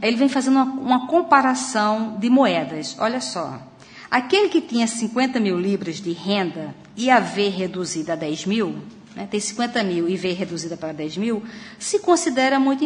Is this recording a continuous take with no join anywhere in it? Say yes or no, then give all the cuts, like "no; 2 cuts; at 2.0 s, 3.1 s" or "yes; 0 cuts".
yes; 0 cuts